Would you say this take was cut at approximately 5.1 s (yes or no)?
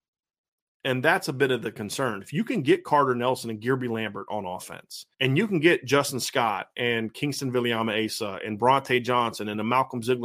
yes